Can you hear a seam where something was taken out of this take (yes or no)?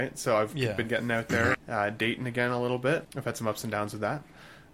yes